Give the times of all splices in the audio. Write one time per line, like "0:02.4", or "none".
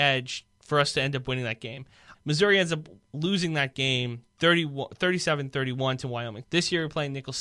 0:02.1
0:06.4